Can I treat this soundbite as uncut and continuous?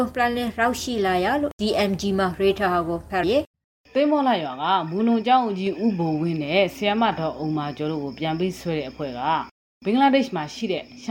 no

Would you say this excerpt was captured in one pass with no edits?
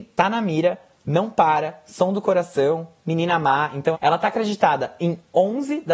no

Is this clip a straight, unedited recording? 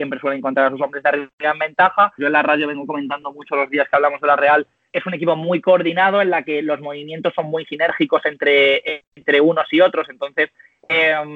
no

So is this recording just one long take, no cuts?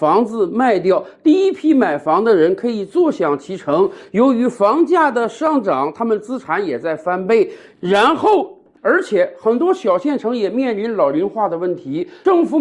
no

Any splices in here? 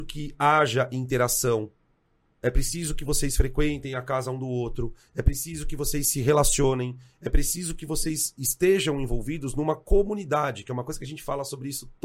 no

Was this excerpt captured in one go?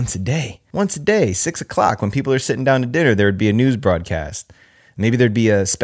yes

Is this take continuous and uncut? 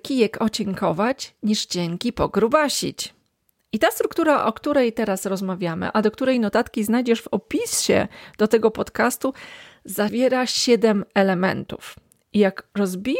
yes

